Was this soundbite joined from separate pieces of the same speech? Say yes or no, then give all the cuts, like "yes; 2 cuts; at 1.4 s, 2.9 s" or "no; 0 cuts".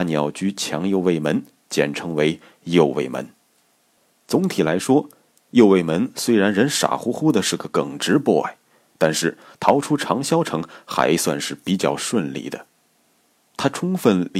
no; 0 cuts